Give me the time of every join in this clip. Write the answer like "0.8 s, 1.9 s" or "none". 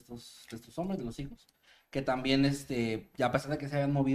none